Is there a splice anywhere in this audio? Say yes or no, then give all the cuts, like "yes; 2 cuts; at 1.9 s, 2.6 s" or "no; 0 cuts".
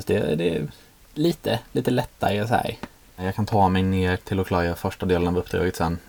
yes; 2 cuts; at 3.1 s, 4.2 s